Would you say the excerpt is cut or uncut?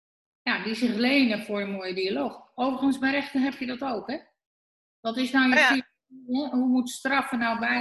uncut